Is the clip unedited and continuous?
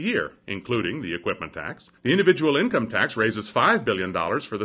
no; 1 cut; at 2.0 s

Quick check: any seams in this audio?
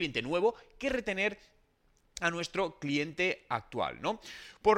no; 0 cuts

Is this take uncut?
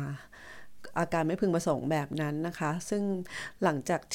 yes; 0 cuts

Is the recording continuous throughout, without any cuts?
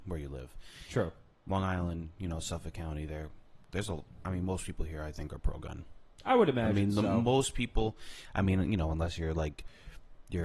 yes; 0 cuts

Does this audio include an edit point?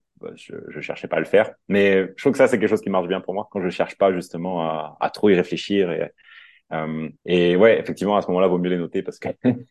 yes; 1 cut; at 7.2 s

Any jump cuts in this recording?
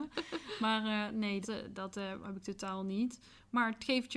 yes; 1 cut; at 1.4 s

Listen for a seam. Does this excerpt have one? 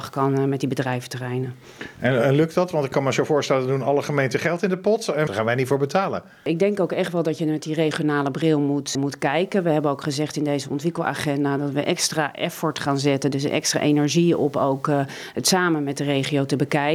yes; 2 cuts; at 5.3 s, 8.9 s

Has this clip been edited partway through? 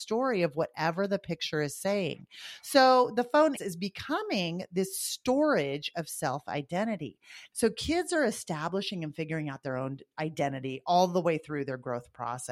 yes; 2 cuts; at 3.6 s, 7.5 s

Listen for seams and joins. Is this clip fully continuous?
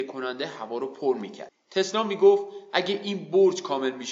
no; 1 cut; at 1.5 s

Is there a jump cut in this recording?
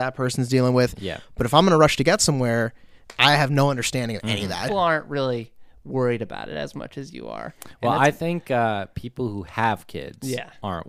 yes; 1 cut; at 4.7 s

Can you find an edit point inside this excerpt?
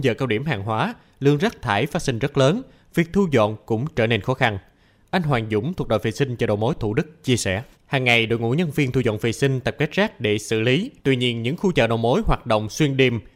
yes; 2 cuts; at 7.7 s, 11.0 s

